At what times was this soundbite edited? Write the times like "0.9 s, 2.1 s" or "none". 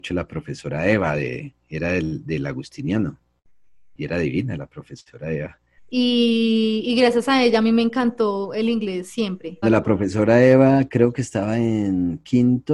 5.8 s, 9.6 s